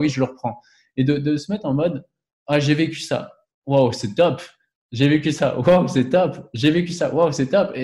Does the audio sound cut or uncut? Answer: uncut